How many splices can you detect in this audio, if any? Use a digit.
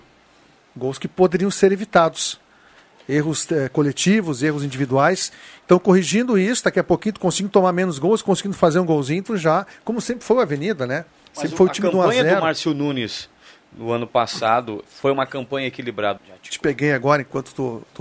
1